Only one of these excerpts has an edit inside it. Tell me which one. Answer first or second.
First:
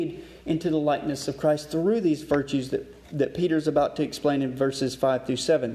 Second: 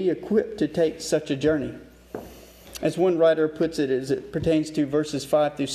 second